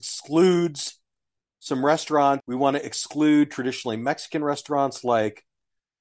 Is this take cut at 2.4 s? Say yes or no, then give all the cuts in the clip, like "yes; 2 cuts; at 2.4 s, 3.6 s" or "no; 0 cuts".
yes; 1 cut; at 2.4 s